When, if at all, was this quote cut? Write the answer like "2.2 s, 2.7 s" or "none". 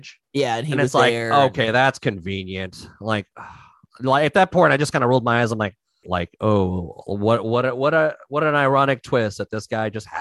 6.0 s